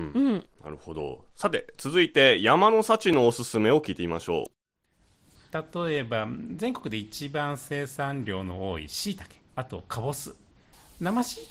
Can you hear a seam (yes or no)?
no